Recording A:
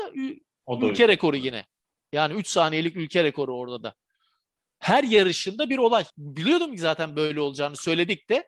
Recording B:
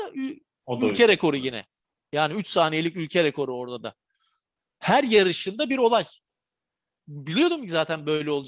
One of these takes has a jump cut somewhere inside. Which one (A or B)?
A